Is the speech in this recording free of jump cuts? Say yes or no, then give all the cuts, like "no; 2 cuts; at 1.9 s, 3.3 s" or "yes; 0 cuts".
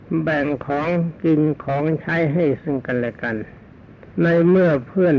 no; 1 cut; at 4.1 s